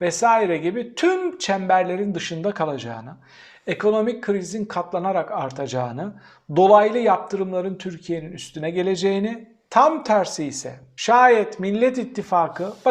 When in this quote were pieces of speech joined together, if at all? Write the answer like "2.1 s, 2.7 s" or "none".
none